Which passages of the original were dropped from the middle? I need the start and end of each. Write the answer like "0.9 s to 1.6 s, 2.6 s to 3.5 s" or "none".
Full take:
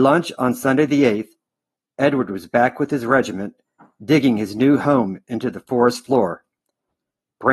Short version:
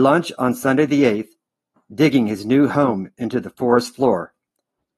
1.8 s to 3.9 s